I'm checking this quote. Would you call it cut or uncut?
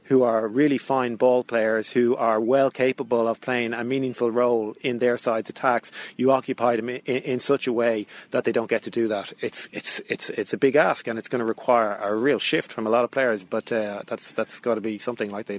uncut